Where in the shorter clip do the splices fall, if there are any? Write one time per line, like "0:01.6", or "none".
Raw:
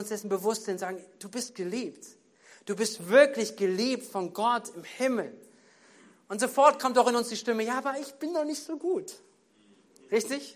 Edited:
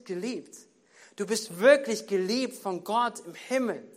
none